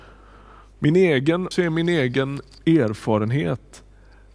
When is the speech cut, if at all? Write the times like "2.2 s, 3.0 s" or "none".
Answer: 1.5 s